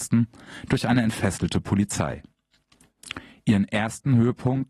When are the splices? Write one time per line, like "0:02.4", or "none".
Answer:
none